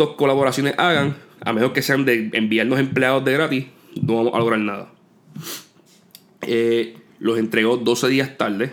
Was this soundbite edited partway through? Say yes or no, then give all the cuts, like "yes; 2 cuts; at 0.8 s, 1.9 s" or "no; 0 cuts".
yes; 1 cut; at 7.1 s